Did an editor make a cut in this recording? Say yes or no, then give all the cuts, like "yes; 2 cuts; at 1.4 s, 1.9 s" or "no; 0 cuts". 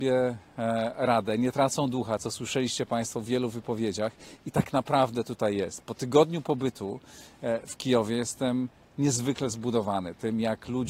no; 0 cuts